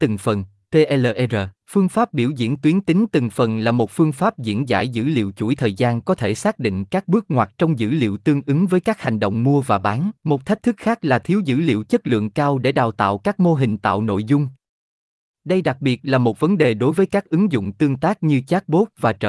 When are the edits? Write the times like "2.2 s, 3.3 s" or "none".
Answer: 1.6 s, 10.2 s

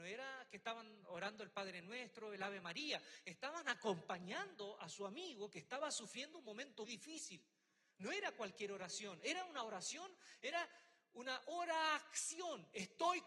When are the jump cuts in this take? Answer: 6.9 s

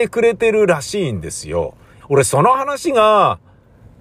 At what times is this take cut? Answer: 2.0 s

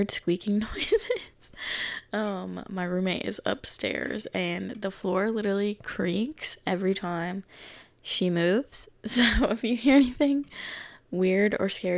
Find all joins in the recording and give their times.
none

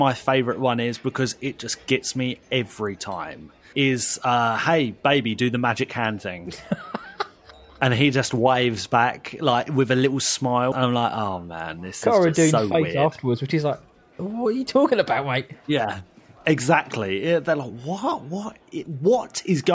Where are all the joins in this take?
10.7 s

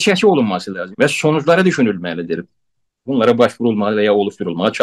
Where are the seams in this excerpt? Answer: 0.9 s, 3.1 s

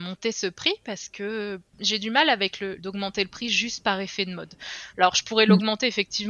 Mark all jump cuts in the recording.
2.8 s, 4.9 s

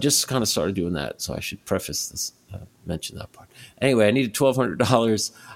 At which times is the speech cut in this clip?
none

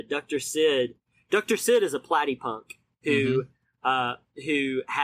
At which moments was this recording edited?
none

